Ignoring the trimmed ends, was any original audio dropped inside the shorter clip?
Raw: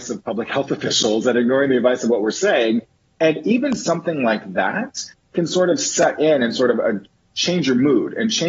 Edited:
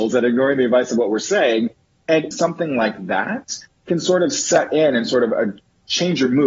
yes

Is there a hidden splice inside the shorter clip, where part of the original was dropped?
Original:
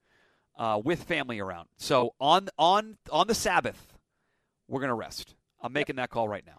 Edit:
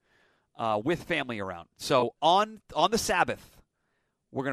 yes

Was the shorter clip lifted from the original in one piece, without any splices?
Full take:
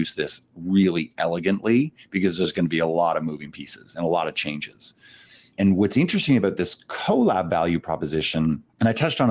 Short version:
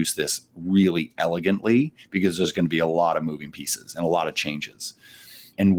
yes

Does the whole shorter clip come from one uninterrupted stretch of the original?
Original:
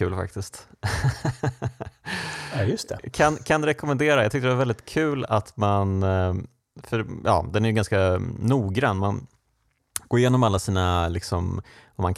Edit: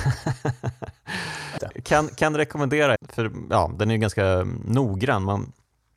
no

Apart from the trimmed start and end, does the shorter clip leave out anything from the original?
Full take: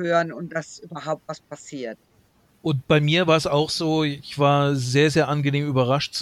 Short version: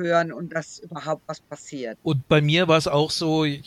yes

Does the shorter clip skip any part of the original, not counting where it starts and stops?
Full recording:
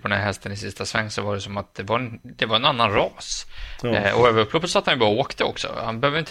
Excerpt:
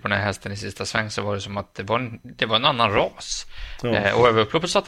no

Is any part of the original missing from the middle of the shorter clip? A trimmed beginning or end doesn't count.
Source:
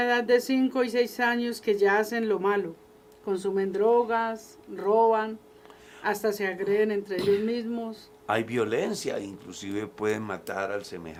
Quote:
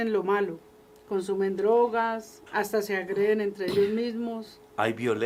yes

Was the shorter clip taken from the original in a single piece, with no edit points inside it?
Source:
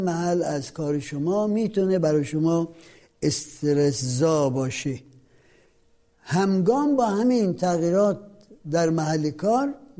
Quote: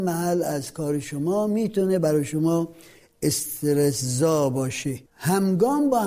no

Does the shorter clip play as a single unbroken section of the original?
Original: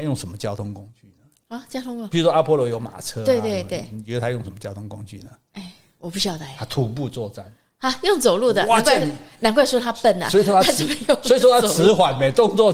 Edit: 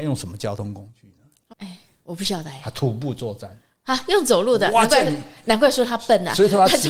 no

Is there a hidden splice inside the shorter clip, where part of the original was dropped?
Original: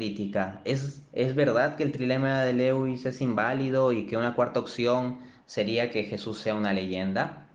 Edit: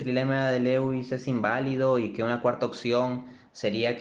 no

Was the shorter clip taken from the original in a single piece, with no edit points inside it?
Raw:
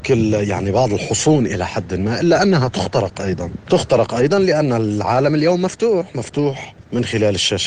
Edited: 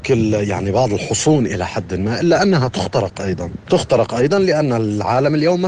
yes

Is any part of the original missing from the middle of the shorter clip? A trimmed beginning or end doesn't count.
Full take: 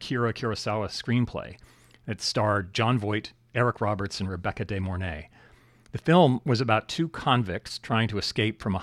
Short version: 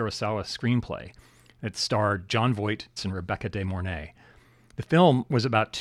yes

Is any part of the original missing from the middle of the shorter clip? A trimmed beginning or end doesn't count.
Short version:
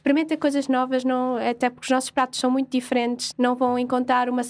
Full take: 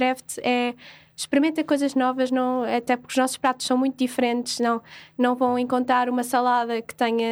yes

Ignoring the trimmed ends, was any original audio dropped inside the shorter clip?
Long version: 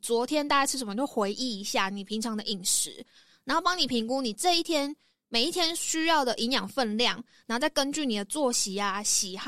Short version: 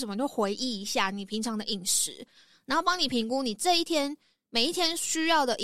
no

